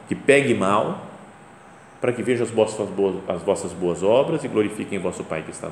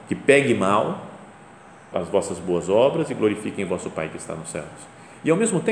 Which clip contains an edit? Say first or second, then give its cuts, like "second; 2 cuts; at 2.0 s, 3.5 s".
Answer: second; 1 cut; at 1.9 s